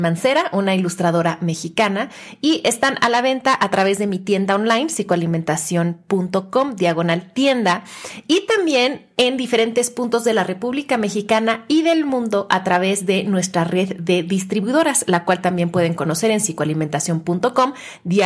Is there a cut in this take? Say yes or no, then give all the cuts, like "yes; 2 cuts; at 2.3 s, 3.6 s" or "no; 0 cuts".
no; 0 cuts